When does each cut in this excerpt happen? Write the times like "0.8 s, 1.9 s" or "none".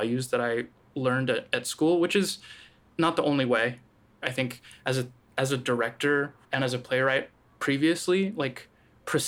4.2 s, 6.4 s